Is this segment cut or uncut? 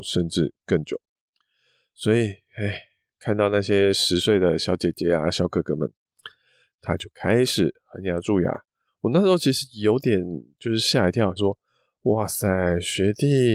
cut